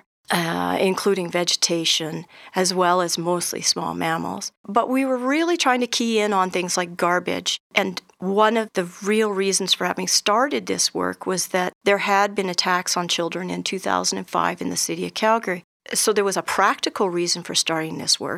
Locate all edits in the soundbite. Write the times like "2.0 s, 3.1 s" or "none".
none